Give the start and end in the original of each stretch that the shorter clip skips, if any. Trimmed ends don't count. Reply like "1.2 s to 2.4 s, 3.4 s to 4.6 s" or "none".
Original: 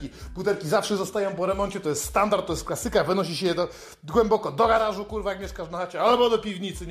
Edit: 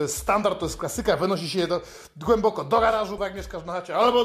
5.0 s to 5.2 s